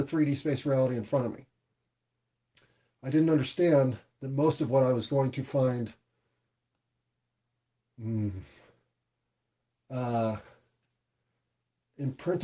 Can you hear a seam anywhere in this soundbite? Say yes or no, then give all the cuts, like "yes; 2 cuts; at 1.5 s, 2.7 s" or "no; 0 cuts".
no; 0 cuts